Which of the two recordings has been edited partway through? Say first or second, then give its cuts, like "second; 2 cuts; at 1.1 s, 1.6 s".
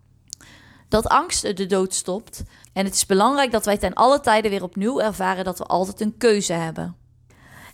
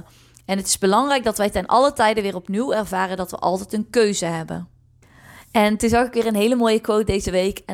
first; 1 cut; at 2.6 s